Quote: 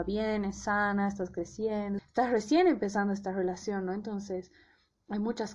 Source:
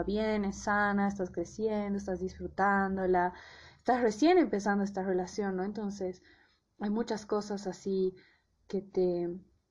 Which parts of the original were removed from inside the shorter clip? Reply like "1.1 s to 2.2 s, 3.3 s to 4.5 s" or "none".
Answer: 2.0 s to 3.7 s

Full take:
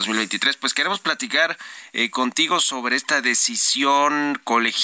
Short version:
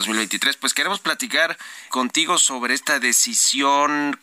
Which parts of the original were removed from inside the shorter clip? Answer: 1.9 s to 2.1 s

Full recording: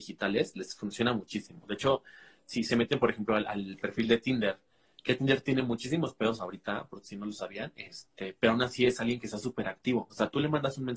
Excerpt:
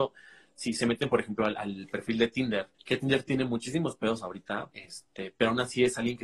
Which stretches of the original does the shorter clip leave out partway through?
4.6 s to 4.9 s, 6.9 s to 7.7 s

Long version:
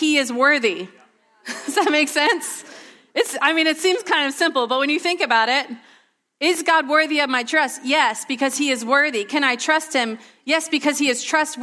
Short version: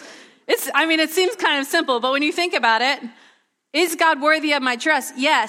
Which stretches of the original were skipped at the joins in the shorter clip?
none

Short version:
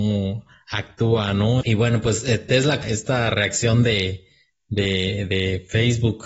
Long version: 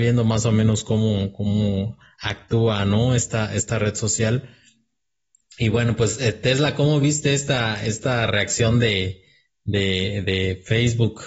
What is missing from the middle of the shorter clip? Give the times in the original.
3.1 s to 5.6 s, 6.8 s to 7.8 s

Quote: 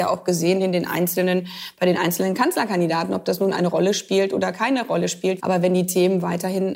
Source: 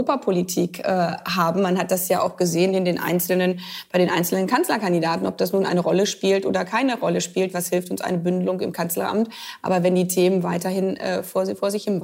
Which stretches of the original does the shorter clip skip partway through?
7.5 s to 9.6 s

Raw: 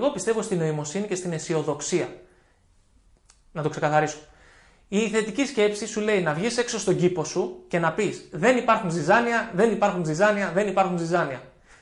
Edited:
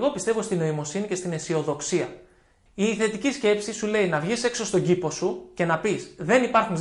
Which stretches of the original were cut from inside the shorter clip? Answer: 2.7 s to 4.8 s

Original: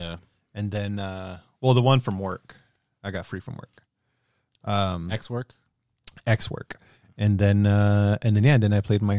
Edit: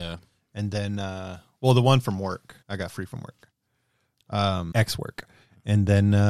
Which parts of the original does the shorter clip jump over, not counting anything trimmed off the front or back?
2.6 s to 3.0 s, 5.1 s to 6.2 s

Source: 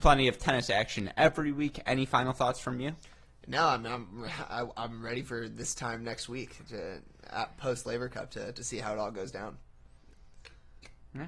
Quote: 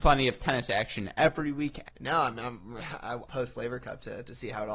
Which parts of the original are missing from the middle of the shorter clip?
1.8 s to 3.3 s, 4.7 s to 7.6 s

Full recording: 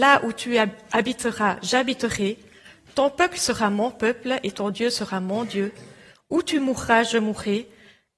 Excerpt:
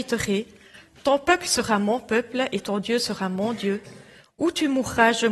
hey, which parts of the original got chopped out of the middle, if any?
none

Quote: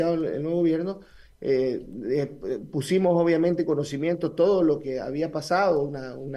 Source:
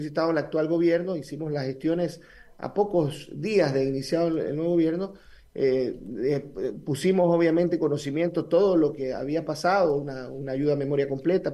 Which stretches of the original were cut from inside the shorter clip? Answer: none

